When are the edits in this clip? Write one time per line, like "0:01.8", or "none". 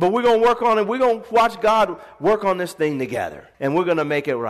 0:03.5